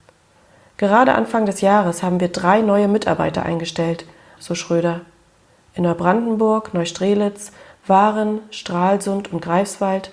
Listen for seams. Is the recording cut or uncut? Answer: cut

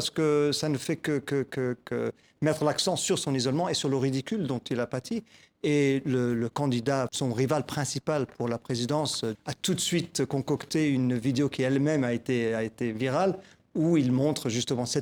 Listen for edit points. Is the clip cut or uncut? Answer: cut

